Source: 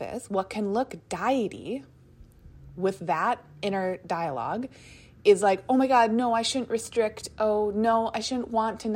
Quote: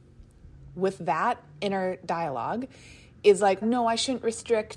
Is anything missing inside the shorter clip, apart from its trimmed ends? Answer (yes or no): yes